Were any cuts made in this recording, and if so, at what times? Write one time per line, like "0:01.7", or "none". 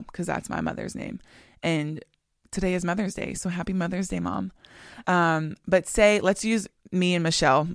none